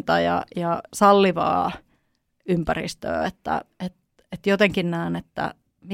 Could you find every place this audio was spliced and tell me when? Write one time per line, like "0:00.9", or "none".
none